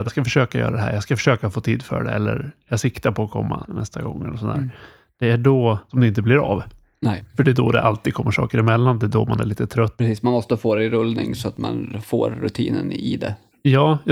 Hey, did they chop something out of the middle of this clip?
no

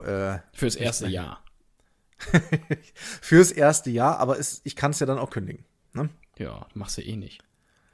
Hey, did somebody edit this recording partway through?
no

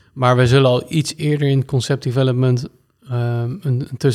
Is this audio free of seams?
yes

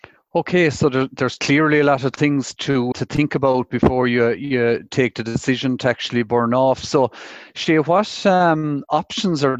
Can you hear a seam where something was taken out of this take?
yes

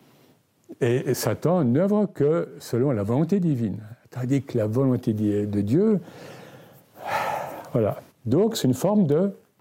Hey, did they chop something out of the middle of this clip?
yes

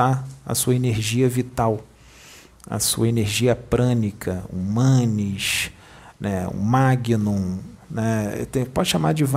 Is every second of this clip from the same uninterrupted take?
yes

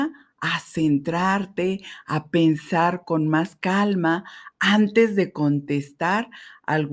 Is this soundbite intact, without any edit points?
yes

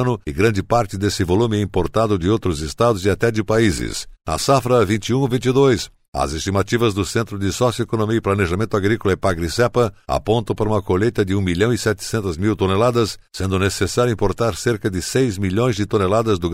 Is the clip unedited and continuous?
no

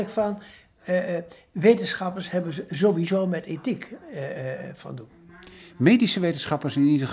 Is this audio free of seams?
yes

